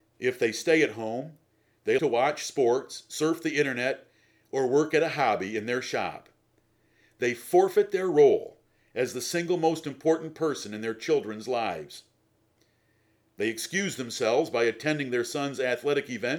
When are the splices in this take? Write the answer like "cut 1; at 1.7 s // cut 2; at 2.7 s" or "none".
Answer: cut 1; at 2.0 s